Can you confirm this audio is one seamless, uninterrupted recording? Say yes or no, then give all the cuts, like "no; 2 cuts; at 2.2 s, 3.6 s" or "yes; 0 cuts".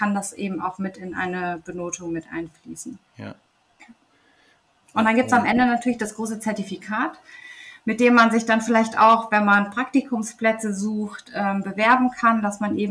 yes; 0 cuts